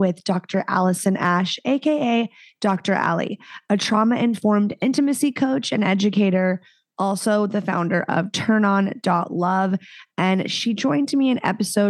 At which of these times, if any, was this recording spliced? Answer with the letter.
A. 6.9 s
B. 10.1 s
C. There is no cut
C